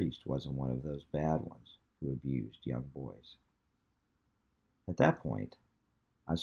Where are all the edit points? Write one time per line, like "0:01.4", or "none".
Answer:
0:04.7